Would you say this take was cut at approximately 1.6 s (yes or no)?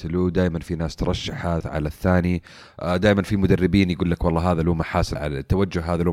yes